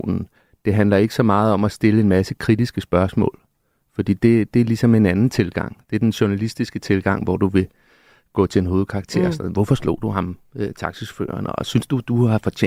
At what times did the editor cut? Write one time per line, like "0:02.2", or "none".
none